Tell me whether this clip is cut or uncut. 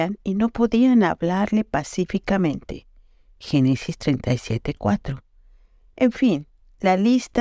uncut